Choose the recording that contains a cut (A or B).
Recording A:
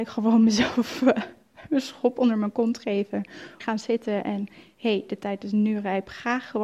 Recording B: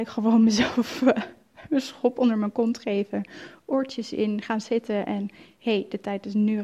A